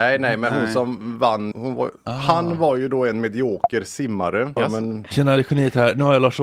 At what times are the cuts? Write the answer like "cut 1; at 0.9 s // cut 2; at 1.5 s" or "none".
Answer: cut 1; at 1.5 s // cut 2; at 4.6 s